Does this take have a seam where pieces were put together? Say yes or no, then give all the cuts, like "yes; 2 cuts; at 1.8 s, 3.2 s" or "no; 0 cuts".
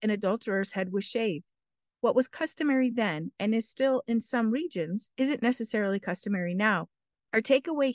no; 0 cuts